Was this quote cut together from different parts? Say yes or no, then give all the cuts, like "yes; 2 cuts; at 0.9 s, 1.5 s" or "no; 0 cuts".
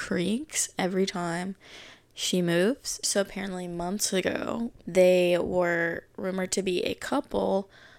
yes; 2 cuts; at 3.0 s, 4.8 s